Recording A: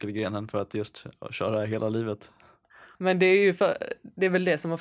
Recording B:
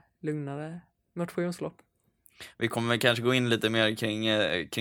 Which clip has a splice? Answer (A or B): A